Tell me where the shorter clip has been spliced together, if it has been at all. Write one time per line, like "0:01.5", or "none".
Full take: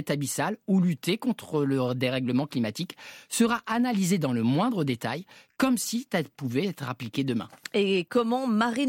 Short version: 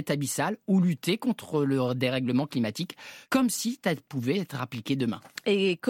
0:03.2